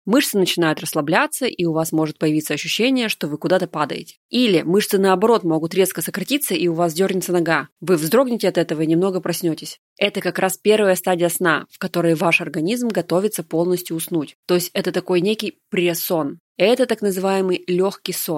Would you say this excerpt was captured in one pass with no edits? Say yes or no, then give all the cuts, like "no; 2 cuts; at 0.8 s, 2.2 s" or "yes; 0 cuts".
no; 2 cuts; at 9.9 s, 16.5 s